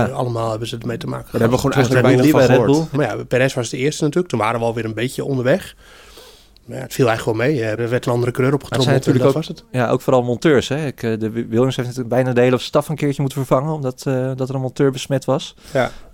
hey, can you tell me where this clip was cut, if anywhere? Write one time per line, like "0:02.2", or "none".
0:02.9
0:07.8